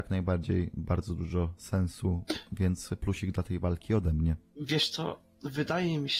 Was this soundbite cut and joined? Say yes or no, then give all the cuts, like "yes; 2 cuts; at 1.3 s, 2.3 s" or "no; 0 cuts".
no; 0 cuts